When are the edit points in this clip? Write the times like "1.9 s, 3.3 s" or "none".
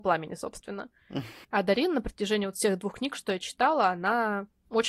none